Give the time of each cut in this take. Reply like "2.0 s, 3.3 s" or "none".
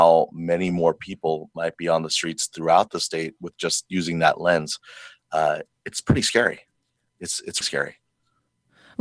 7.6 s

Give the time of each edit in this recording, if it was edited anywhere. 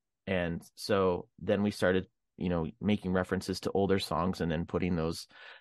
none

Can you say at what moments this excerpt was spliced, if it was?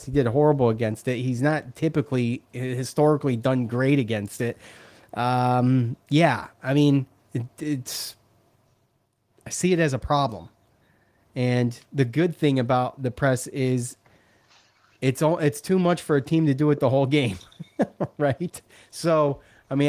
none

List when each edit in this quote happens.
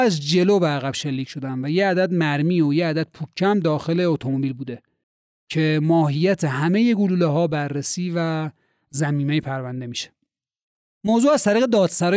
10.9 s

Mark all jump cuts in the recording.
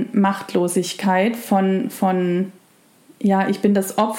none

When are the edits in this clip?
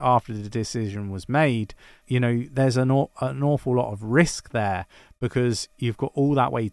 2.0 s

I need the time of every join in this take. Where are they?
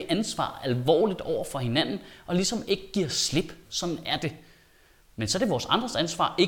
3.6 s

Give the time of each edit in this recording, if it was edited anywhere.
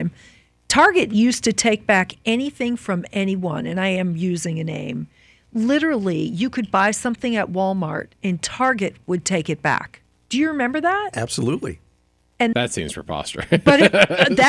12.5 s

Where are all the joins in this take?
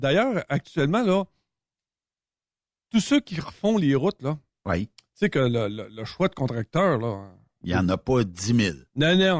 none

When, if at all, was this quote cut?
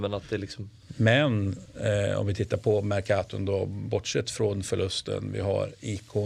none

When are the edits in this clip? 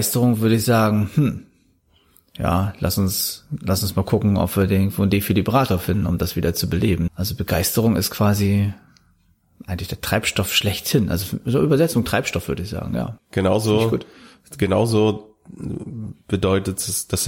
7.1 s, 13.2 s

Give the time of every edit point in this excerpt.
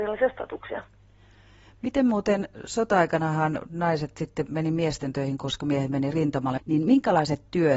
6.6 s

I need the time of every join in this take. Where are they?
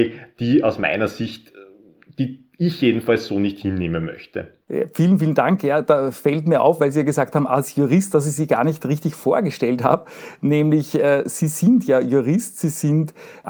none

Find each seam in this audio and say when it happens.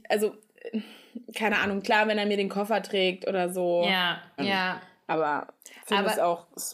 4.4 s

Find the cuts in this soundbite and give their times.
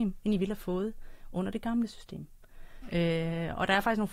2.8 s

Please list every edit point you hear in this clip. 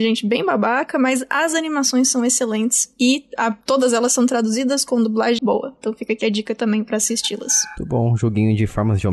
5.4 s

